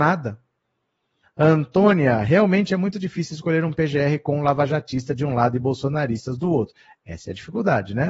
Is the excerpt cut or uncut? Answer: cut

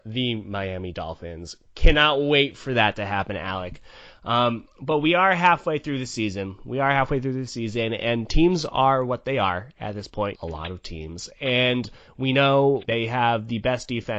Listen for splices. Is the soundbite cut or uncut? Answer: cut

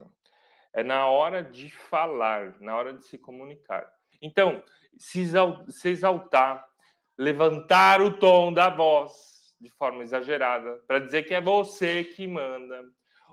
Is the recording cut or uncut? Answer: cut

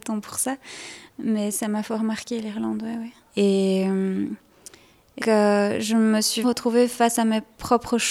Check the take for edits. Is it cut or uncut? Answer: cut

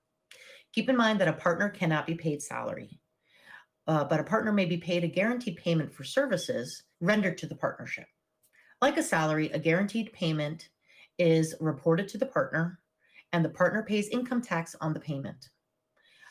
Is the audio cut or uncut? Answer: cut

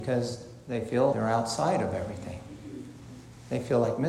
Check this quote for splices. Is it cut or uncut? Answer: cut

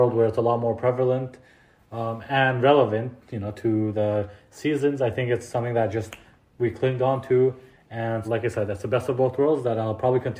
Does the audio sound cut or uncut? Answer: cut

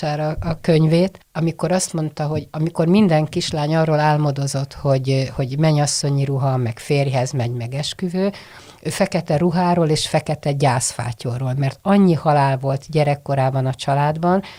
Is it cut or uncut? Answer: uncut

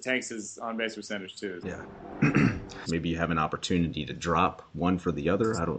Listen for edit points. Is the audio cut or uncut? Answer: cut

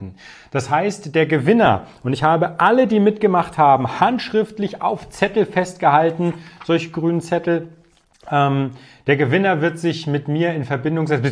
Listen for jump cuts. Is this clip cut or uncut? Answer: uncut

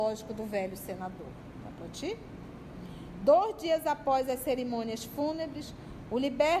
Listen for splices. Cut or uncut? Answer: uncut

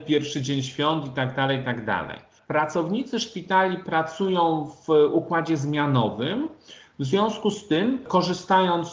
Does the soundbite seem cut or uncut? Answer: uncut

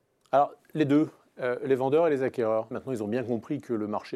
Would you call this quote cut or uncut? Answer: cut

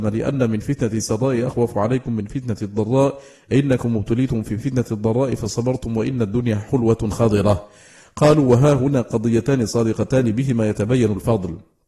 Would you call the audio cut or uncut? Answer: uncut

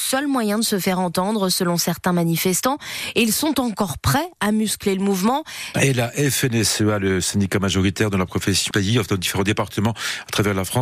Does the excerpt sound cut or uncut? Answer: cut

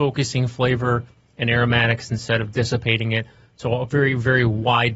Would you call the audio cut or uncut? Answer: uncut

